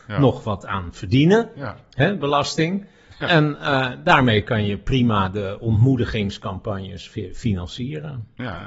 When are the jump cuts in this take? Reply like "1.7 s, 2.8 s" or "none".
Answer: none